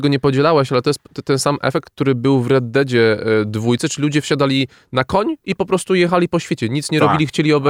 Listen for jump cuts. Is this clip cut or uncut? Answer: uncut